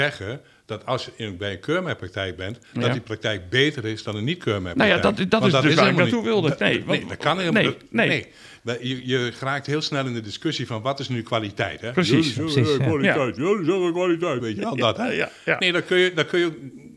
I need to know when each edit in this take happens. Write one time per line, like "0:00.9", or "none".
0:08.6
0:14.4